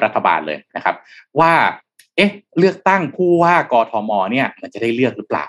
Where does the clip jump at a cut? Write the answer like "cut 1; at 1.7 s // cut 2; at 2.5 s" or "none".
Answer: none